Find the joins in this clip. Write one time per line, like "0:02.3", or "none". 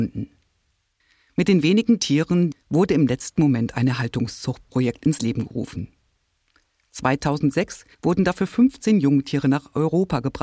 0:02.5
0:07.9

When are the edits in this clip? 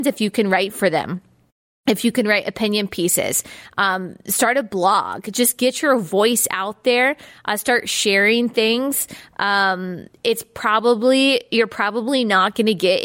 none

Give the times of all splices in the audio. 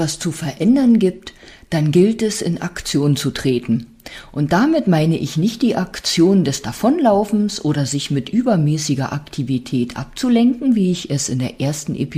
none

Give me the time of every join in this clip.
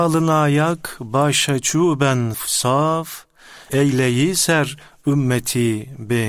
0:02.3

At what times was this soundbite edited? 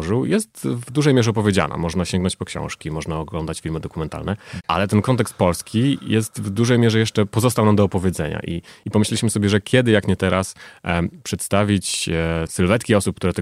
0:12.5

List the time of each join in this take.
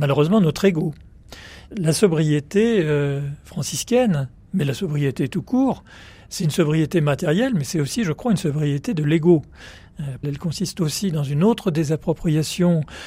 0:10.2

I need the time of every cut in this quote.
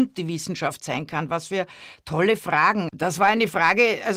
0:02.9

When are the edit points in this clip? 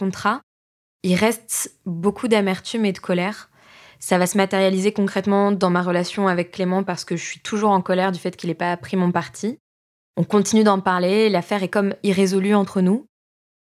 none

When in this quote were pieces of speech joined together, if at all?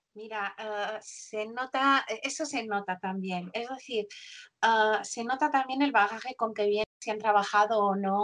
none

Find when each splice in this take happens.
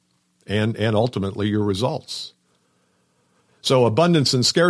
none

